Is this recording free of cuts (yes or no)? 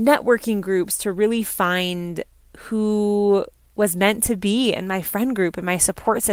yes